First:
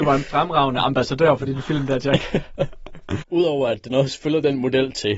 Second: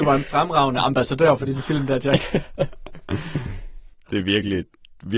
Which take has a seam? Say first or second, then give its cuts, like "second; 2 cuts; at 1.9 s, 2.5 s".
first; 1 cut; at 3.2 s